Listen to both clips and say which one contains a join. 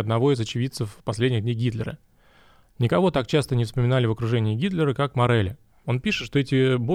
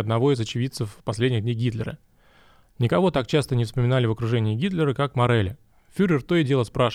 first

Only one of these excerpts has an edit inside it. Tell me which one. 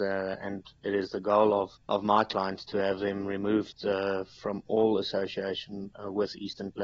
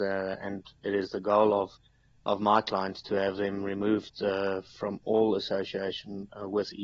first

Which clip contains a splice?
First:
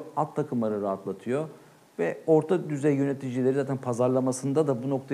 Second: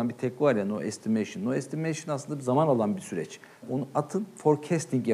second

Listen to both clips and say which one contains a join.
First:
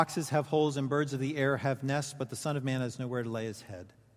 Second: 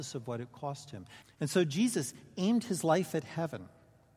second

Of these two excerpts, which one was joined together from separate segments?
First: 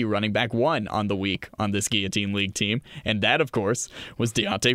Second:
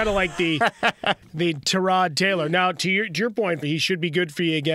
second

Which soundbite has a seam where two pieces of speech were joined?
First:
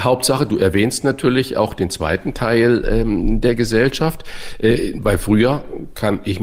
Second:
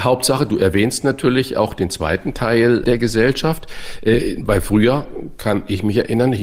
second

